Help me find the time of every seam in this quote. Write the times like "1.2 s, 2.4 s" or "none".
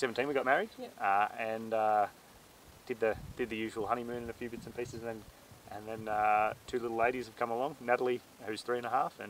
none